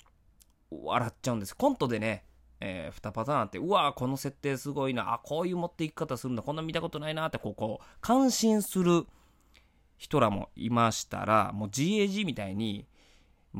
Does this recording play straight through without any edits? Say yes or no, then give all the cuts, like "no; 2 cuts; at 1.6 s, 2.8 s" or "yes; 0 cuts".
yes; 0 cuts